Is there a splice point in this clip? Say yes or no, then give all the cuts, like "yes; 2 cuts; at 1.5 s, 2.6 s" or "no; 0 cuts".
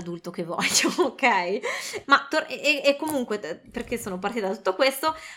yes; 1 cut; at 2.0 s